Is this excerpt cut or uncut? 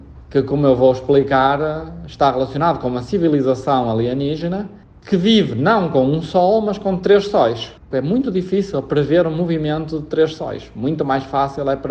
cut